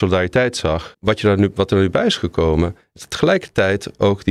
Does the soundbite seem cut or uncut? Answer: cut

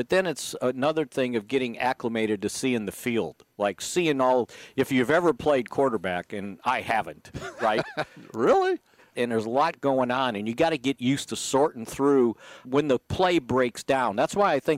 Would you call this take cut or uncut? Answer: cut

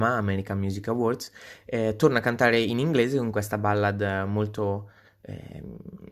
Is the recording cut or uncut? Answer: uncut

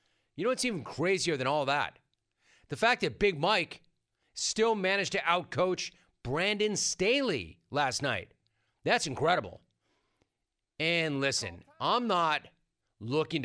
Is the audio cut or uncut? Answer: uncut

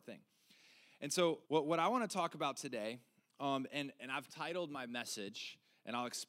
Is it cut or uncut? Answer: cut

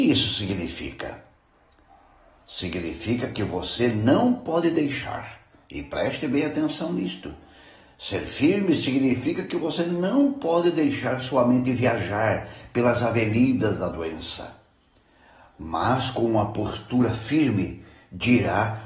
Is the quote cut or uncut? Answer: uncut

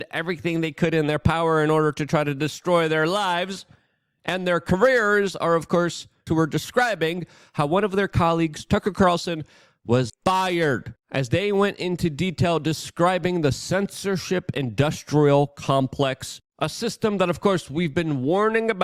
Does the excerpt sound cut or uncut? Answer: cut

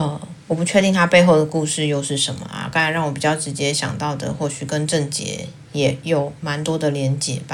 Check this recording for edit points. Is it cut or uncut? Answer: uncut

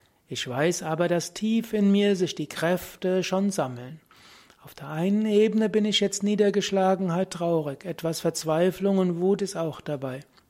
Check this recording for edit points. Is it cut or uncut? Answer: uncut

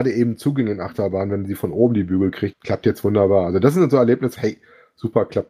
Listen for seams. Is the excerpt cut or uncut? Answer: cut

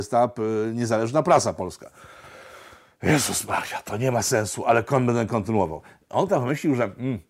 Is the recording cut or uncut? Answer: uncut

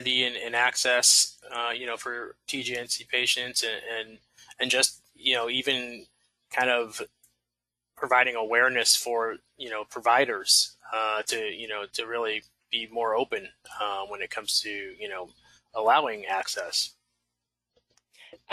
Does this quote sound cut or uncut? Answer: uncut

